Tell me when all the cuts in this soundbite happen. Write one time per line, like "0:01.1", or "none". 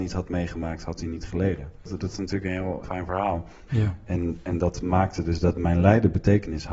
0:01.8
0:03.7